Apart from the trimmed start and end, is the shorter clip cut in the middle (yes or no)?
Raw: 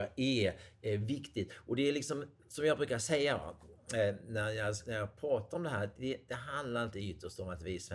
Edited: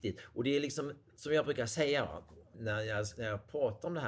yes